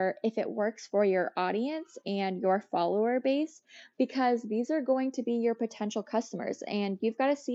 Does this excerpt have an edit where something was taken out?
no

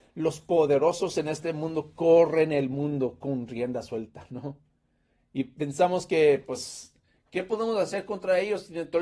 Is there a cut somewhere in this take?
no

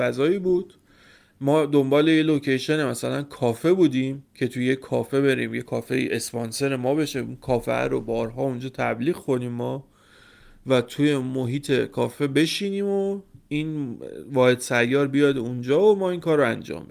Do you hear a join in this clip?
yes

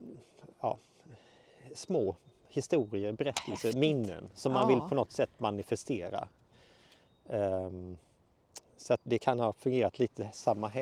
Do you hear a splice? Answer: yes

